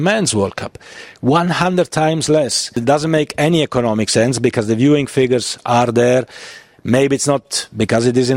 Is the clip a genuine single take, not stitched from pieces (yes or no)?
yes